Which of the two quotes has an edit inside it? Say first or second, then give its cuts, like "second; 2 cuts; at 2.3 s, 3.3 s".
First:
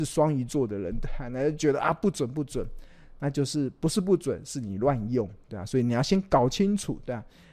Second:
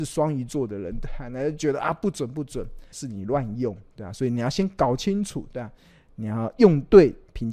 second; 1 cut; at 2.9 s